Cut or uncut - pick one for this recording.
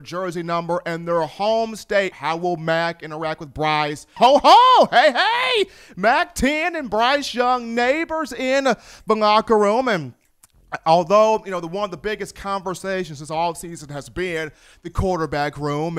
cut